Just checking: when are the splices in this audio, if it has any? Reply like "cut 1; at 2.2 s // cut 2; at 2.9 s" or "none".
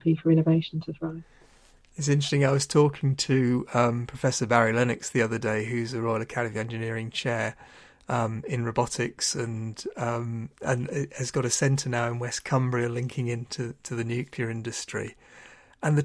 none